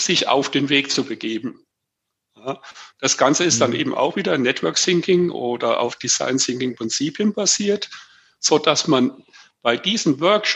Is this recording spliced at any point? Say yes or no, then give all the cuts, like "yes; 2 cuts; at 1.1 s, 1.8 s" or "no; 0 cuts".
no; 0 cuts